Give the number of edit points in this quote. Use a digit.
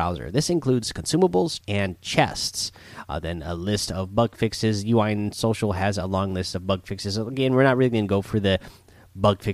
1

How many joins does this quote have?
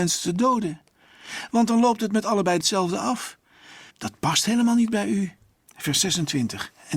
2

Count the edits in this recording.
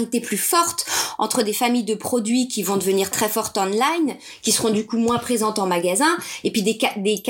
1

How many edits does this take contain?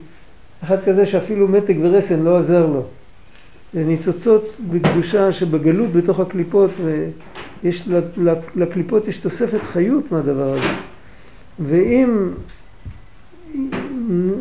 1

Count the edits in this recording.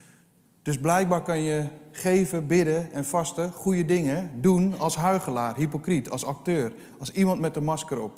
0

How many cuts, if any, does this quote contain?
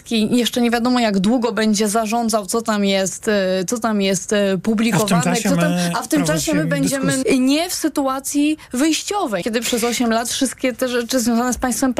2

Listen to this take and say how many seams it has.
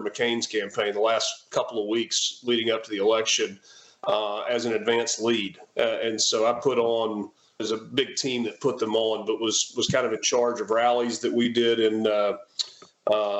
1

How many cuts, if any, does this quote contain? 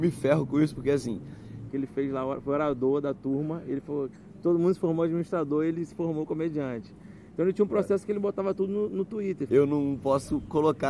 2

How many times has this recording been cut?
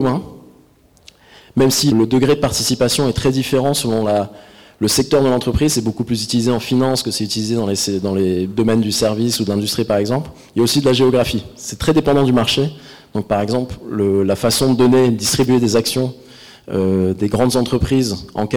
1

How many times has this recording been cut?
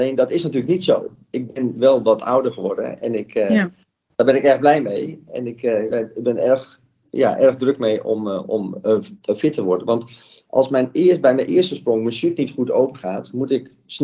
0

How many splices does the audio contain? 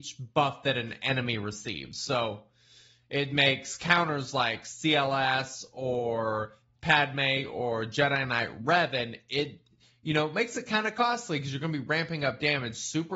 0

